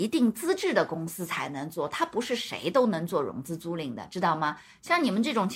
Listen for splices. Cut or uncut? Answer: uncut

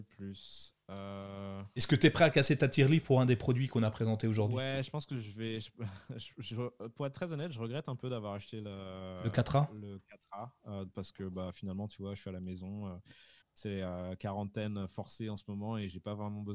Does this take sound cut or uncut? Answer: uncut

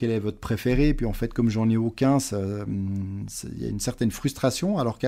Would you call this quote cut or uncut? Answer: uncut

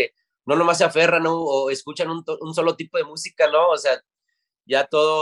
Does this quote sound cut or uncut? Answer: uncut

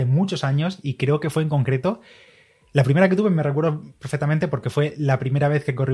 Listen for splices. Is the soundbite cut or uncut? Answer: uncut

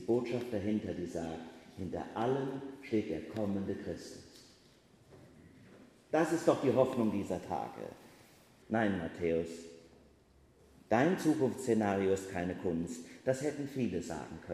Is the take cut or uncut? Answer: cut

